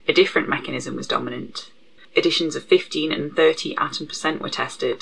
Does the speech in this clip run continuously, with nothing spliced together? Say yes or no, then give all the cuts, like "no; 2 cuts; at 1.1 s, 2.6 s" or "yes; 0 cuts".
no; 1 cut; at 2.0 s